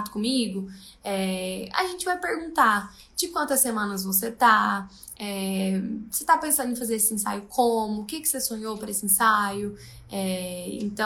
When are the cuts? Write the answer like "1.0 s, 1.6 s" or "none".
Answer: none